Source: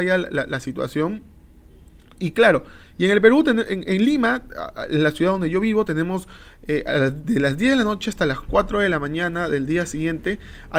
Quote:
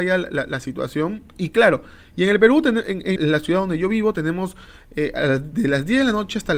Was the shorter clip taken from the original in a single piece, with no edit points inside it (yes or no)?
no